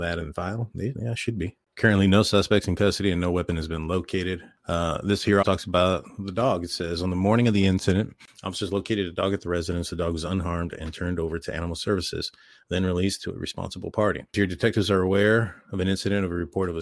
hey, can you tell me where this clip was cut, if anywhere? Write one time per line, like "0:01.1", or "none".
0:05.4

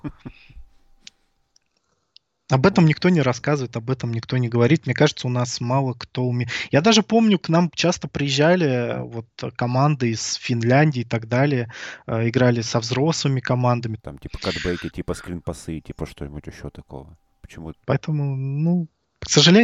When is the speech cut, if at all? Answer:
0:14.0
0:17.8

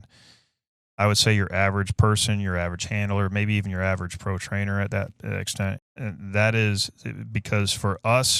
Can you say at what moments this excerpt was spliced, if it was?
0:05.8

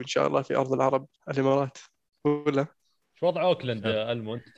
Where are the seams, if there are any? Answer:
0:01.2

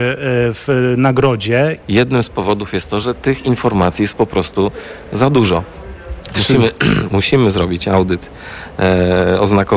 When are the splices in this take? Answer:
0:01.8
0:07.1

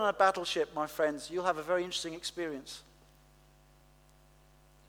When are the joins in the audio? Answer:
none

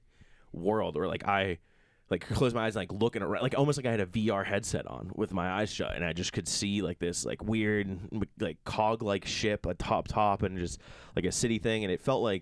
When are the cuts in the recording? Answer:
none

